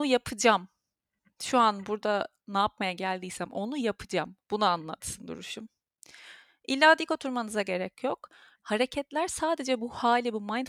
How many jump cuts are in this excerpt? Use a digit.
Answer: 1